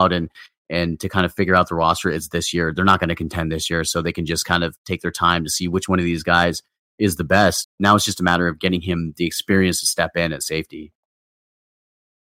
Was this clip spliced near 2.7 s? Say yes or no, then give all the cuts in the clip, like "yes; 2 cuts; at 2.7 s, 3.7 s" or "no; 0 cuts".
no; 1 cut; at 7.6 s